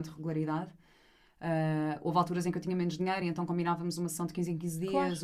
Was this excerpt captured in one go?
yes; 0 cuts

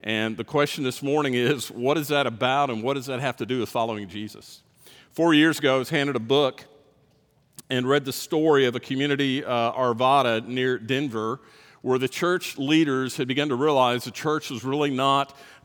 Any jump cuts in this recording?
no; 0 cuts

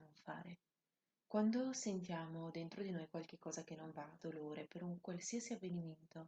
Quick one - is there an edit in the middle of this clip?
yes; 1 cut; at 4.2 s

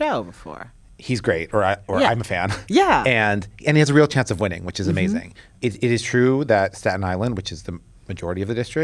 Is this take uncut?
yes; 0 cuts

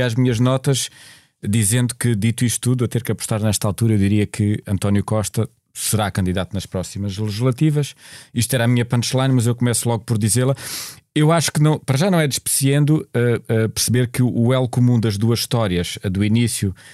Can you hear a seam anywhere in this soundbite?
no; 0 cuts

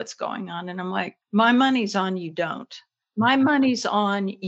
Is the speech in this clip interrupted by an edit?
yes; 1 cut; at 1.2 s

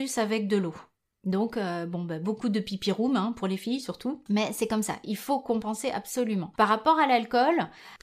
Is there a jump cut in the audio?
no; 0 cuts

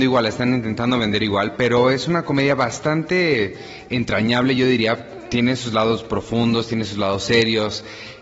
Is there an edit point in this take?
no; 0 cuts

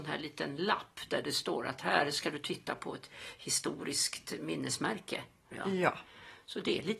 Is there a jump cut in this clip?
yes; 1 cut; at 5.5 s

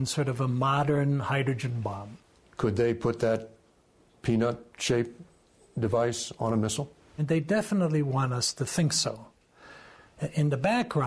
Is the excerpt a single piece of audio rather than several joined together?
yes; 0 cuts

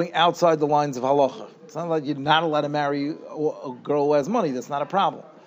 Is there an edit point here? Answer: no; 0 cuts

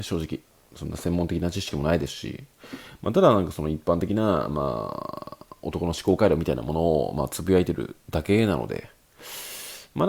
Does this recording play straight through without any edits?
yes; 0 cuts

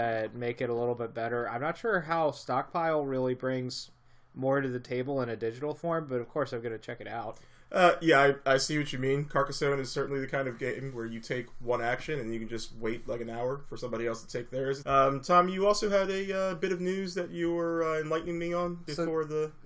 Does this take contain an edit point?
yes; 1 cut; at 14.8 s

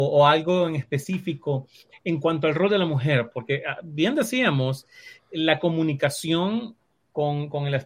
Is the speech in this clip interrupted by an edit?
no; 0 cuts

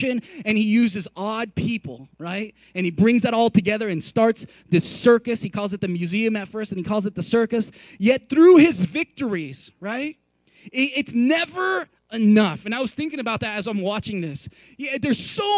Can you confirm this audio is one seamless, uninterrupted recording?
yes; 0 cuts

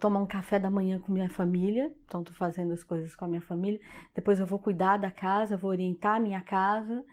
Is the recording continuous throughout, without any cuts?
yes; 0 cuts

